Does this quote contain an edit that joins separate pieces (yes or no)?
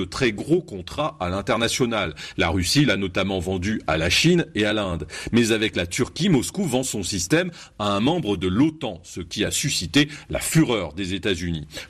no